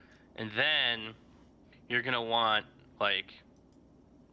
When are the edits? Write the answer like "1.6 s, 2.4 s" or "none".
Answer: none